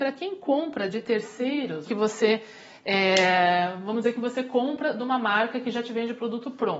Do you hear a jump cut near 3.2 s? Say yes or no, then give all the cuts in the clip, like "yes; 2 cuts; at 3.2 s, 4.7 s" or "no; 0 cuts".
no; 1 cut; at 1.8 s